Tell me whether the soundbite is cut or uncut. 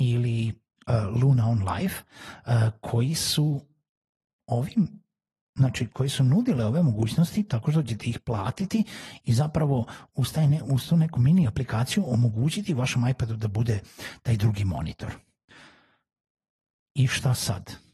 uncut